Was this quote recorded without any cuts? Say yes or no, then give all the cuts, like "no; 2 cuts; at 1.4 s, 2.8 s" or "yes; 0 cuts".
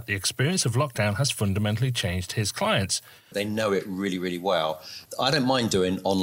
no; 2 cuts; at 3.3 s, 5.1 s